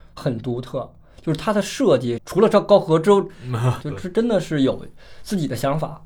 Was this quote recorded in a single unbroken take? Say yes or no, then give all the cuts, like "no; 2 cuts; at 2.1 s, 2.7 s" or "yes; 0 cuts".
no; 2 cuts; at 2.2 s, 3.8 s